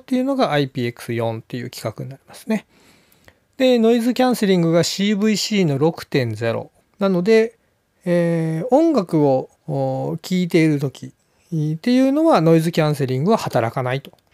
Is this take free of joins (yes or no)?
no